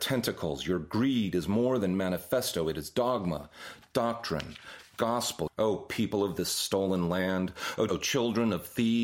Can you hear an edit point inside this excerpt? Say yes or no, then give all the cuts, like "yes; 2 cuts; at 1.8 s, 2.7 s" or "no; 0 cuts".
yes; 2 cuts; at 5.5 s, 7.9 s